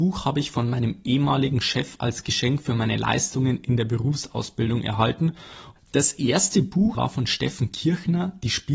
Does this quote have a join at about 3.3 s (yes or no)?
no